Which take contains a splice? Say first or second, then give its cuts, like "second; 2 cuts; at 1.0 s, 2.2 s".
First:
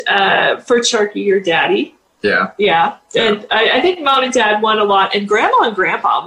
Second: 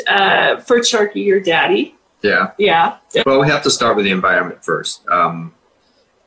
second; 1 cut; at 3.2 s